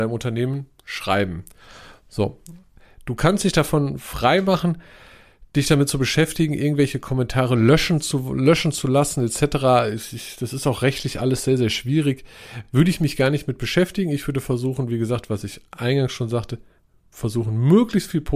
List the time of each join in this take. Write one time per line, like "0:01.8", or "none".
none